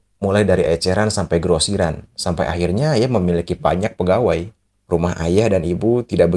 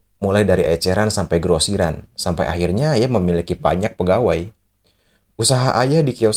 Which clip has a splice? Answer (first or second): first